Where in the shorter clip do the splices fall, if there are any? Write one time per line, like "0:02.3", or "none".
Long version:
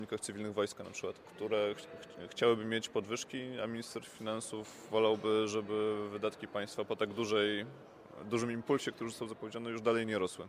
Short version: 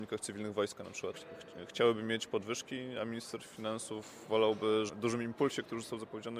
0:01.1
0:04.9